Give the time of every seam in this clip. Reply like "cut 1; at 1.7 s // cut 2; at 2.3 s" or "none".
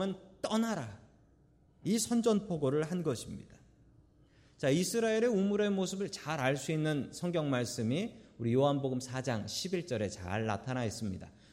none